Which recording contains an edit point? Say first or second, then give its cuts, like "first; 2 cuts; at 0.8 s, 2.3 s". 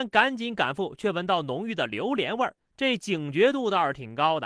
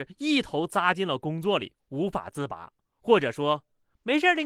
first; 1 cut; at 2.6 s